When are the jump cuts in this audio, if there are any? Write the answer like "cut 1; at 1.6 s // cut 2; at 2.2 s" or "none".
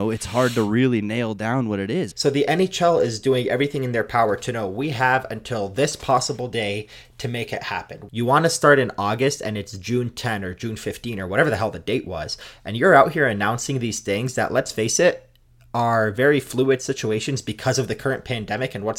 cut 1; at 2.1 s // cut 2; at 8.1 s